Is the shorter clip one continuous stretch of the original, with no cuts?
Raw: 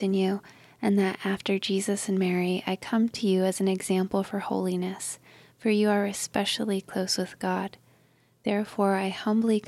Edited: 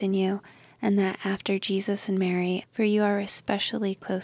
no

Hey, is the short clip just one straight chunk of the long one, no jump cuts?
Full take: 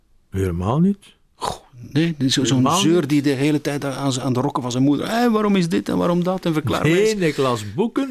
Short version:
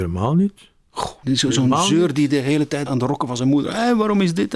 no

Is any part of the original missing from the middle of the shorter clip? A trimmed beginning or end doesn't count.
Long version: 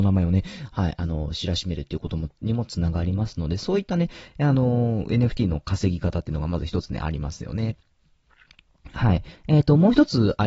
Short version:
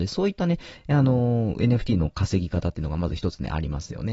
no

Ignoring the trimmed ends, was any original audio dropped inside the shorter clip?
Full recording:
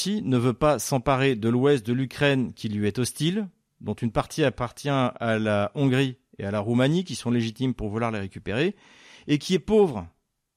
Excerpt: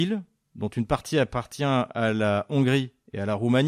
no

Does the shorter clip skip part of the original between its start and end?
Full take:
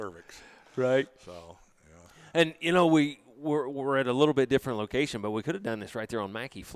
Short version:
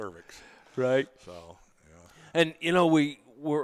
no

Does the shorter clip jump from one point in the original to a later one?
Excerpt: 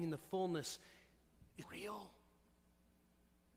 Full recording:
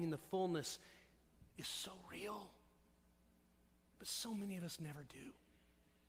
yes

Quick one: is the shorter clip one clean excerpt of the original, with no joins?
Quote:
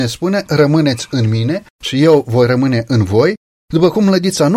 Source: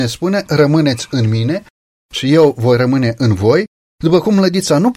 no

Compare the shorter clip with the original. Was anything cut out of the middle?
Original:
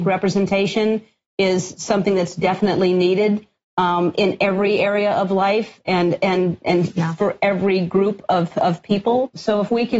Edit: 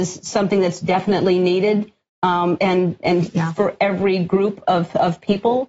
yes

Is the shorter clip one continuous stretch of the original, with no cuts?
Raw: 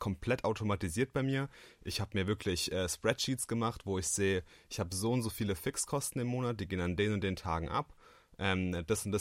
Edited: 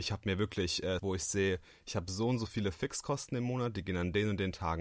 no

